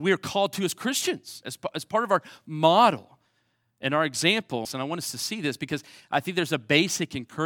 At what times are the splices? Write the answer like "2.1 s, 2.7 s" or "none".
1.4 s, 4.7 s